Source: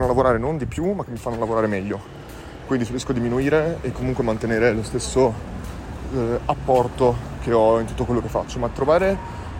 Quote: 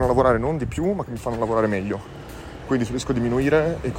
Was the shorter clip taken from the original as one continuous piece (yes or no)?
yes